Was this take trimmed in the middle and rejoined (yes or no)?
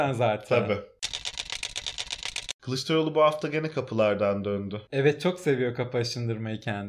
no